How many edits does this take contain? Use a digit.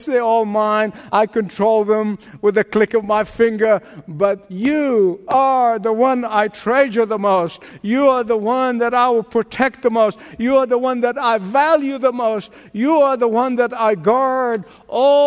0